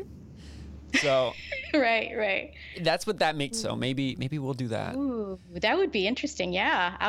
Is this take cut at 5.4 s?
no; 1 cut; at 3.5 s

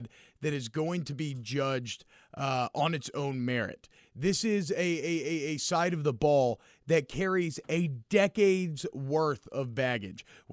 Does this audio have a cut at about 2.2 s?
no; 0 cuts

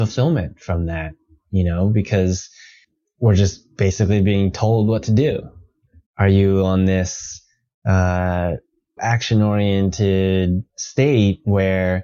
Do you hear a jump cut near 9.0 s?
yes; 3 cuts; at 6.0 s, 9.0 s, 10.7 s

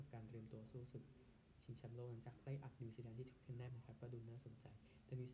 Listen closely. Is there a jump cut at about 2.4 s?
no; 1 cut; at 3.7 s

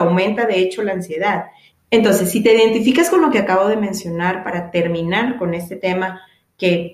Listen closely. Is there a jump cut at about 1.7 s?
yes; 1 cut; at 1.7 s

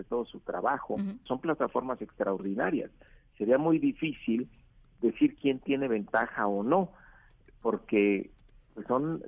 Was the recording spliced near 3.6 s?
no; 1 cut; at 1.3 s

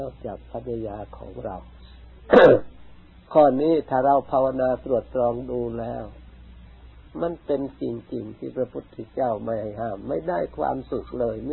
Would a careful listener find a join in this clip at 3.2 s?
yes; 1 cut; at 3.2 s

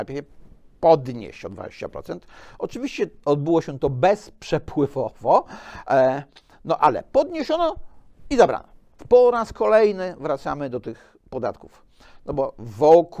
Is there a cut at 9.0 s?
yes; 2 cuts; at 3.2 s, 9.0 s

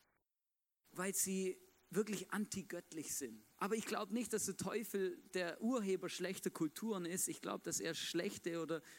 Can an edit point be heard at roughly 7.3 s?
no; 1 cut; at 3.5 s

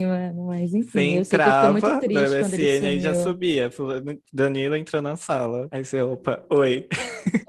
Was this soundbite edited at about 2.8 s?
no; 0 cuts

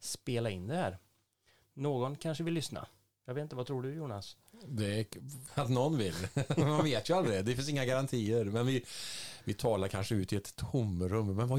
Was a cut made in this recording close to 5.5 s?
yes; 1 cut; at 5.5 s

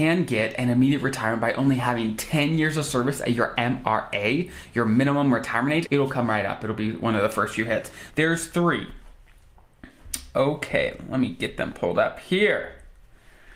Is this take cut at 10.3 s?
no; 2 cuts; at 5.9 s, 8.1 s

